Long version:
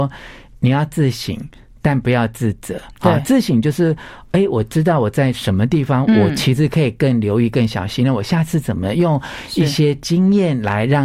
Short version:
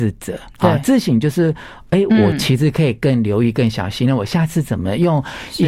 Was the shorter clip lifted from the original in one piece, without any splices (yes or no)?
no